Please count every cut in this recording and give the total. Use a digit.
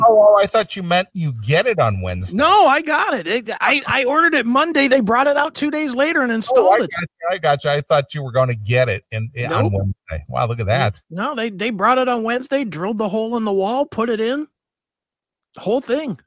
0